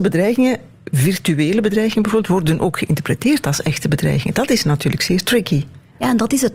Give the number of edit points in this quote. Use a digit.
1